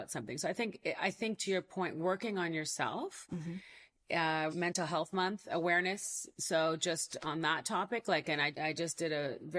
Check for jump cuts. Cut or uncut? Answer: cut